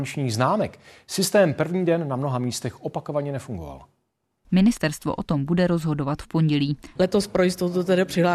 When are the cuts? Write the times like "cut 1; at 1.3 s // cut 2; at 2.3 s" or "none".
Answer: cut 1; at 4.4 s // cut 2; at 7.0 s